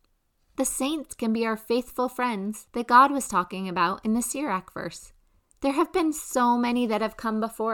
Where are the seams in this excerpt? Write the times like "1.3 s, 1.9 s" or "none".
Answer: 5.4 s